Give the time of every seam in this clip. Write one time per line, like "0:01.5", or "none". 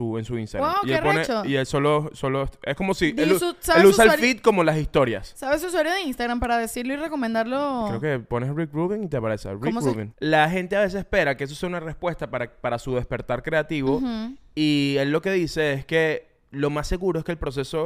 0:10.1